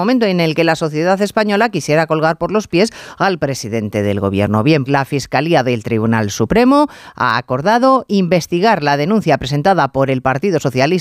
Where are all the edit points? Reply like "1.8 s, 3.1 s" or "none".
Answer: 4.9 s

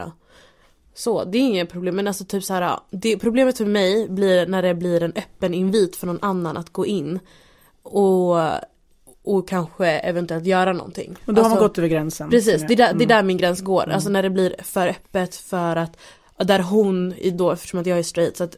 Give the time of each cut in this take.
none

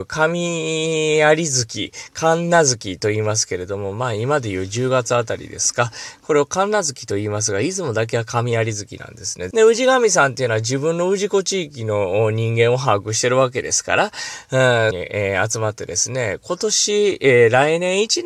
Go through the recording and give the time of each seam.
9.5 s, 14.9 s

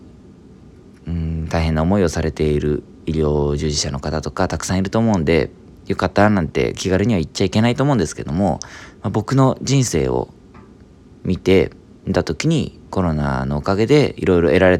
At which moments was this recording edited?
12.8 s

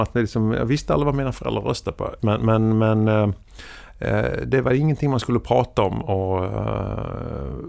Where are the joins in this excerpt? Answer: 2.2 s, 6.0 s

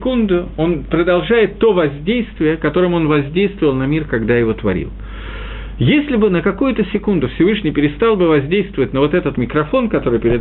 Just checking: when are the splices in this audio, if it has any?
9.3 s

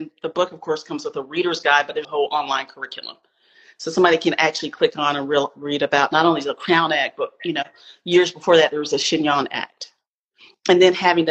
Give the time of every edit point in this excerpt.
2.0 s

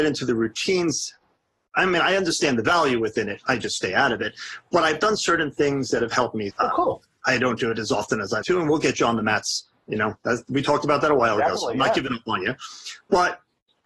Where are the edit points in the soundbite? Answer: 6.5 s, 8.4 s

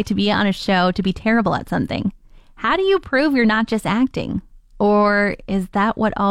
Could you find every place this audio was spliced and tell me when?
none

